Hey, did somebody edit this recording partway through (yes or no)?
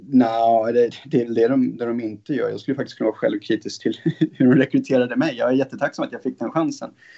no